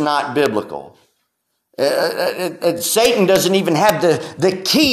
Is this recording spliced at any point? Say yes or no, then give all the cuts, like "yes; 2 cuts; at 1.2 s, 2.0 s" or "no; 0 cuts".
no; 0 cuts